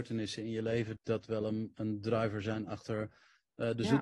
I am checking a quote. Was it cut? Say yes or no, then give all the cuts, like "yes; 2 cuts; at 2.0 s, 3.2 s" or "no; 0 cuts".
yes; 1 cut; at 1.0 s